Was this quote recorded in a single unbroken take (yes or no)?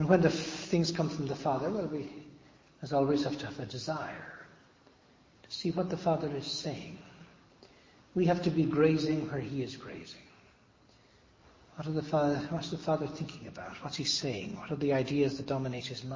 yes